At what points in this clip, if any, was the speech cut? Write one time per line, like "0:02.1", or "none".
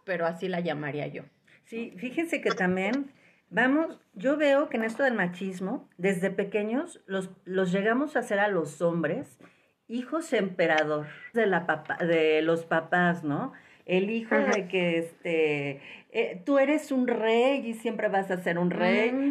0:11.3